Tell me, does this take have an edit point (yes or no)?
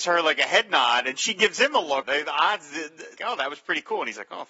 yes